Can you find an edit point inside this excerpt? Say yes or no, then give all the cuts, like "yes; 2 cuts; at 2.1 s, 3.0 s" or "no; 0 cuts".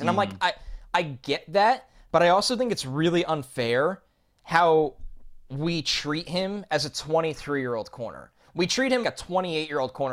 yes; 1 cut; at 9.0 s